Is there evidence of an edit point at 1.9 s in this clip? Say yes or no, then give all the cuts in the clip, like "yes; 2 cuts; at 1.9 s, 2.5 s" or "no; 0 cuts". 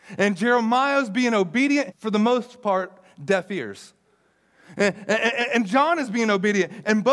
yes; 1 cut; at 1.9 s